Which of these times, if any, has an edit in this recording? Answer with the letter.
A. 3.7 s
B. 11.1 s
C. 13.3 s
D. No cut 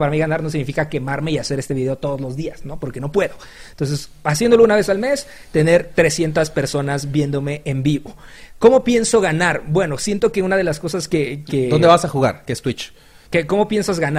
C